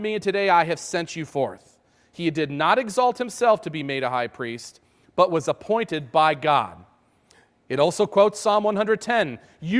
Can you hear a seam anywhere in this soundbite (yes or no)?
no